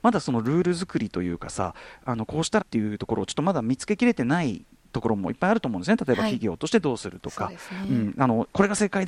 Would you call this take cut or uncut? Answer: cut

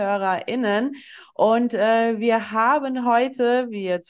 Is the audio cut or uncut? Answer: uncut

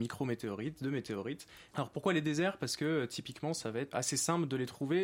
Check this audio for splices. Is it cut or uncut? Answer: cut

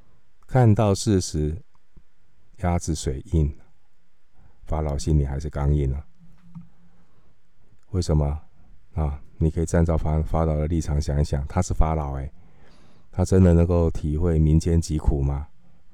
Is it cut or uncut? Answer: uncut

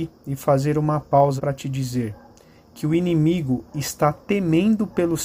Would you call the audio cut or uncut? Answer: cut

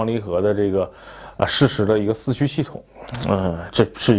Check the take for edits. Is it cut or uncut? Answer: cut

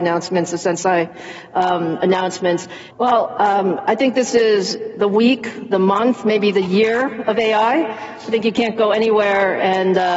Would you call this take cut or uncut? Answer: cut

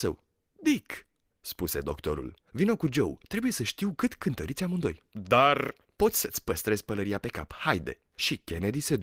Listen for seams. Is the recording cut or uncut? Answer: uncut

